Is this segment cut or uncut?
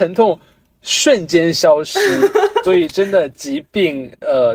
cut